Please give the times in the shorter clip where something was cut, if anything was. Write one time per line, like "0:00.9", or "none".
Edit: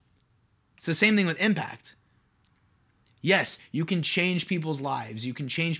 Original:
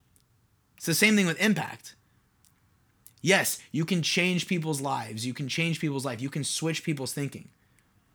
none